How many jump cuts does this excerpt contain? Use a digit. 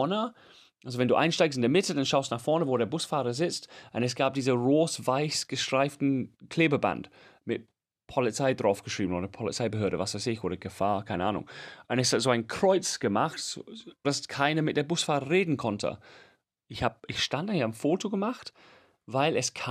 2